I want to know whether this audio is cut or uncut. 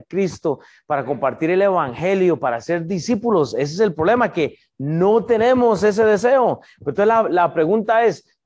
uncut